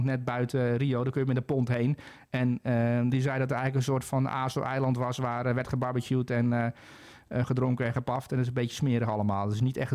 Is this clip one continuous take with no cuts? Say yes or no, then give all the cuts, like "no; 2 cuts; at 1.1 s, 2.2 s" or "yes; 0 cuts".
no; 1 cut; at 3.1 s